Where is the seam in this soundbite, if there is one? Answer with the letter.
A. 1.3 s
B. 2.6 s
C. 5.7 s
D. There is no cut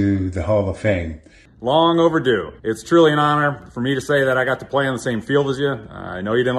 B